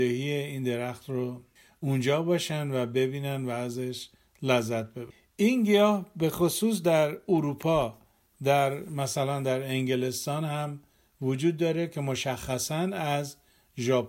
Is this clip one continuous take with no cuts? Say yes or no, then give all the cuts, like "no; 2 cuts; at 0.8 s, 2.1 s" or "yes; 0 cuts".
yes; 0 cuts